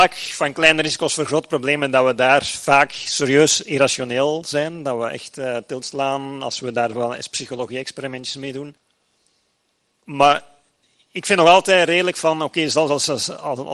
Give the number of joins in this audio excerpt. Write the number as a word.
zero